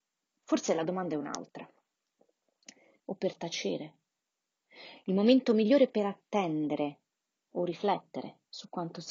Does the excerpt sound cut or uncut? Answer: cut